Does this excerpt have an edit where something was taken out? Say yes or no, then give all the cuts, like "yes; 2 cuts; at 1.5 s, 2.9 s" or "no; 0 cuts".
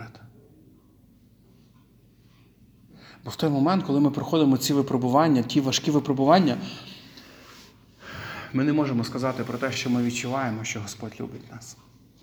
no; 0 cuts